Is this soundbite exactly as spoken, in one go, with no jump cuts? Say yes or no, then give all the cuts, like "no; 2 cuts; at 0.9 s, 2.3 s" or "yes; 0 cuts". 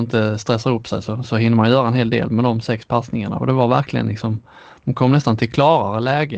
yes; 0 cuts